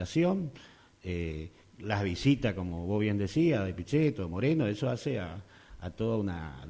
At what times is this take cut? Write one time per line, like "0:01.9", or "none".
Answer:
none